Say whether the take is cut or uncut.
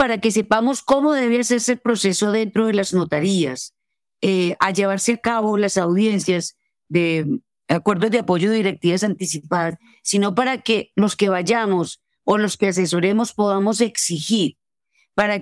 uncut